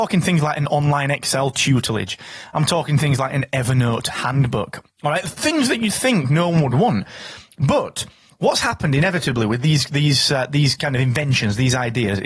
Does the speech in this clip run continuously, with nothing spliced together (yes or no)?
yes